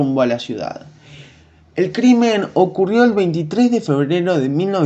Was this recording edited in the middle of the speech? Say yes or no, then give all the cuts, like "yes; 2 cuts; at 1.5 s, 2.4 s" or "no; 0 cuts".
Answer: no; 0 cuts